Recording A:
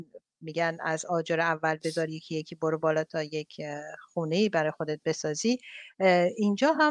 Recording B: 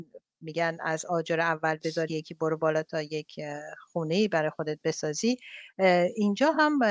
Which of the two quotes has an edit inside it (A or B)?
B